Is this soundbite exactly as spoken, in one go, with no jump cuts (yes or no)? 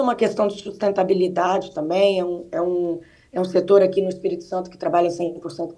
yes